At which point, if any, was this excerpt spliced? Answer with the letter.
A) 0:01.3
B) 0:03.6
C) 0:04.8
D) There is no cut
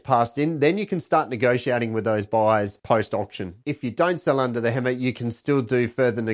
B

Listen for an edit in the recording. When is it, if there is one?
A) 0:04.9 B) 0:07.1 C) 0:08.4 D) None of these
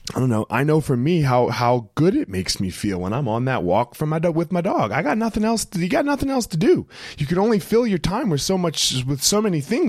D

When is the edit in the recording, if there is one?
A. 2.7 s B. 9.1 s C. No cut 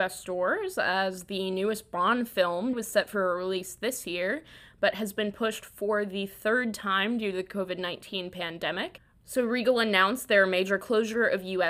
A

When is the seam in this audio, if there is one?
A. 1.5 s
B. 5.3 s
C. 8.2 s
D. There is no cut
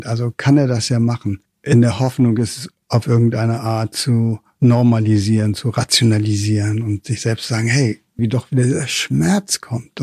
C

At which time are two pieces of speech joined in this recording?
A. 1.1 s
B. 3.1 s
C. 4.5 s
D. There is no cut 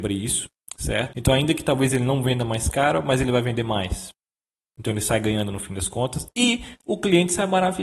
A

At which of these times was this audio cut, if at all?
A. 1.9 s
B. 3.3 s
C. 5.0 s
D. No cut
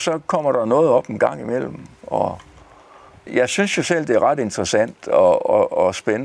B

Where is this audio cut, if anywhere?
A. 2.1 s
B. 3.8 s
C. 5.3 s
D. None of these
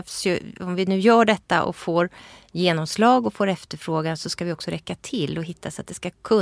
D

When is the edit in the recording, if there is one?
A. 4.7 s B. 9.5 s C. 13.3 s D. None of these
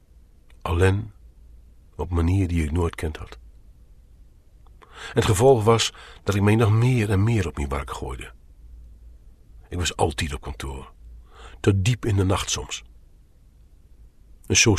D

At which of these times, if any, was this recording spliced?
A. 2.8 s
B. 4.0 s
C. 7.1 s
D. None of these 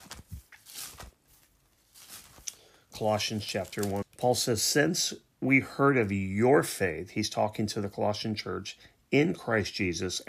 B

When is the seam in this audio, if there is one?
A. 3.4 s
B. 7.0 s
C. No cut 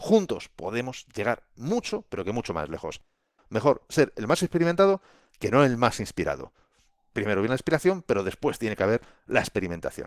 A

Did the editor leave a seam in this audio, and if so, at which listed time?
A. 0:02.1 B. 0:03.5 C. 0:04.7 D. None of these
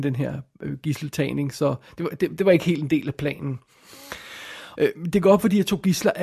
C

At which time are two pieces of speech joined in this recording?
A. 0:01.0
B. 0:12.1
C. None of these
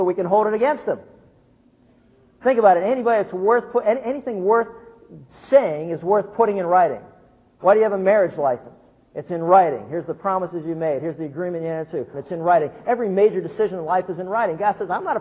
B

